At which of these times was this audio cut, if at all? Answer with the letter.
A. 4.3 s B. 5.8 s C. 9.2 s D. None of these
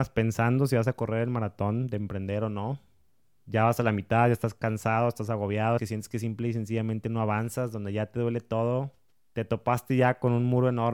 B